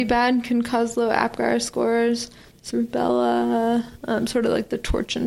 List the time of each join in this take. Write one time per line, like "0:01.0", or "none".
0:02.7